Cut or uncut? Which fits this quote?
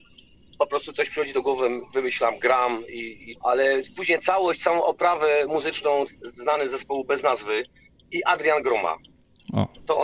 cut